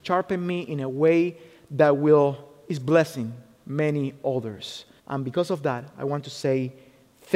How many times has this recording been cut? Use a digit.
1